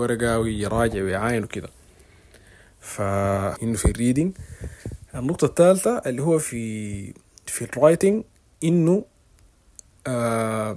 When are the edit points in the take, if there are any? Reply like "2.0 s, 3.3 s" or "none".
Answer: 3.6 s